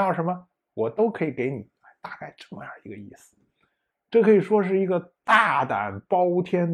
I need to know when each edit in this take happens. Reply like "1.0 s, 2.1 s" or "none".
3.9 s